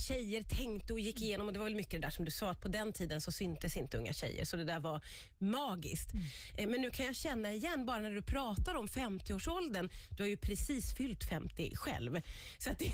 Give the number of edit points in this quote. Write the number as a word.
zero